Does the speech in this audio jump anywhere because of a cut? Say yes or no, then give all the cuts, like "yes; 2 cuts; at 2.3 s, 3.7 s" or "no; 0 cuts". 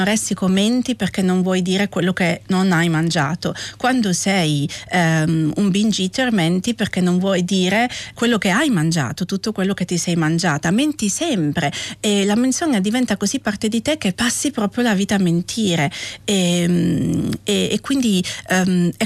yes; 2 cuts; at 8.2 s, 14.1 s